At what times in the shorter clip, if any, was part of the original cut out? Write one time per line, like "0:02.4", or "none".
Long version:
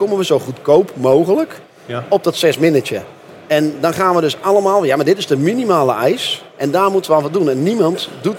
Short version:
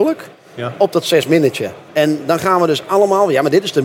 0:01.9